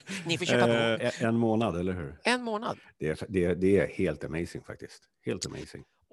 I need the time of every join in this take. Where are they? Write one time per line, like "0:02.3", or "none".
0:00.9